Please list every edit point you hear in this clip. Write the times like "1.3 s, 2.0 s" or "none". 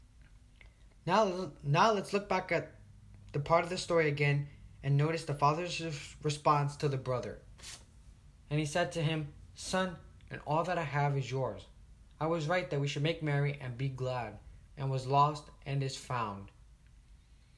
10.3 s, 14.7 s